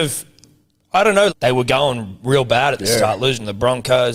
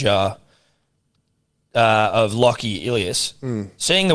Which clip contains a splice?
first; 1 cut; at 1.3 s

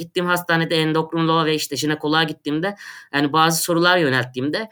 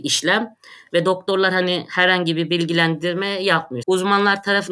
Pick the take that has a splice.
second; 1 cut; at 3.8 s

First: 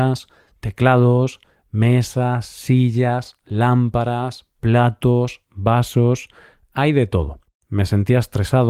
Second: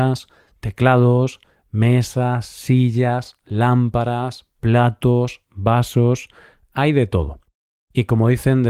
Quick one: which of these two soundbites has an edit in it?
first; 1 cut; at 7.6 s

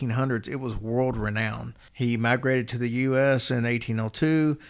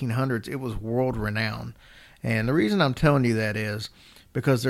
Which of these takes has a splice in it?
first; 1 cut; at 1.9 s

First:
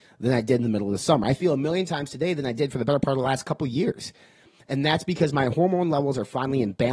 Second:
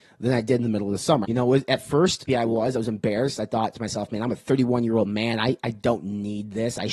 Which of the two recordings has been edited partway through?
second; 2 cuts; at 1.2 s, 2.3 s

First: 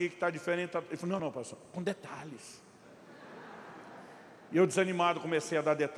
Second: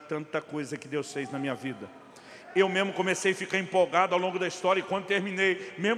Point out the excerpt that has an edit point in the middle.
first; 1 cut; at 1.2 s

